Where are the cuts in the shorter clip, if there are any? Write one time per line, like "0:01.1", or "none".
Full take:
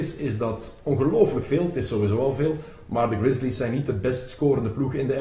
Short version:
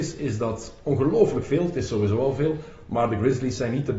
none